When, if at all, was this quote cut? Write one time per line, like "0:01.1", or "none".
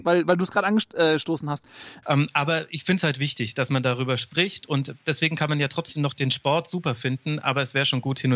0:02.0

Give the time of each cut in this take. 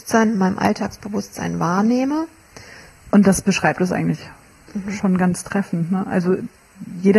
0:03.1

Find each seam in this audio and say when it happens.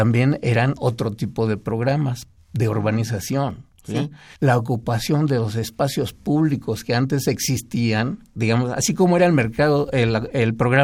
0:04.3
0:08.3

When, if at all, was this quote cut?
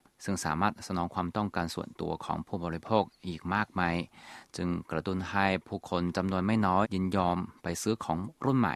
0:06.8

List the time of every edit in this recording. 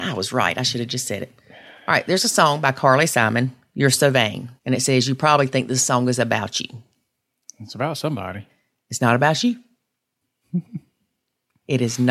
0:04.6

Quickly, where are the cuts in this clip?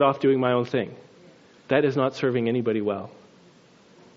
none

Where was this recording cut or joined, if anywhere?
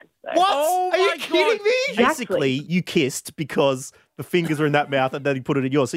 0:02.0

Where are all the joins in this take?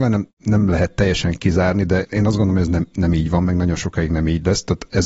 none

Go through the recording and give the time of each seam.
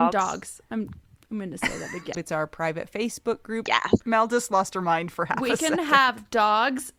0:02.1
0:03.7

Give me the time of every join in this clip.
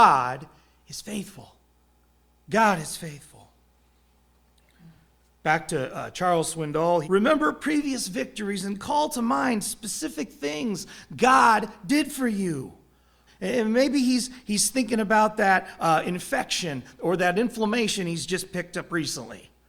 0:07.0
0:13.3

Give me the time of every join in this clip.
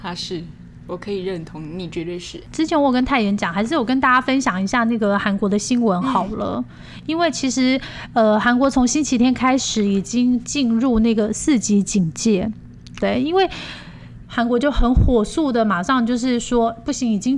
0:13.0
0:14.2

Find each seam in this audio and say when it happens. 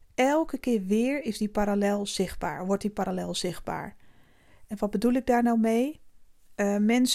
none

